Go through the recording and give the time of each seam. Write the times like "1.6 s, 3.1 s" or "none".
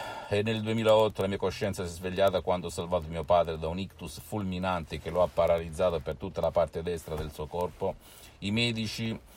none